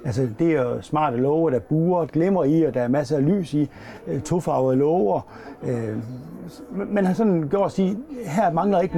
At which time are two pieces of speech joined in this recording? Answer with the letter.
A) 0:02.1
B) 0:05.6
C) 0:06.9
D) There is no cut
A